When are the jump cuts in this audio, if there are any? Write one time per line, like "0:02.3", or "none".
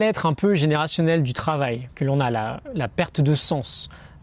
none